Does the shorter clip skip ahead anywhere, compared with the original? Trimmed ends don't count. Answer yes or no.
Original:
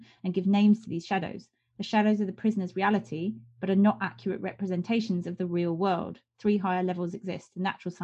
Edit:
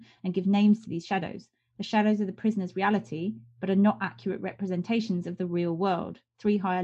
no